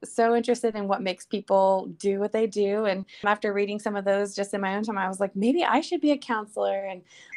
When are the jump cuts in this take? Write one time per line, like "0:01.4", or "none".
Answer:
0:03.2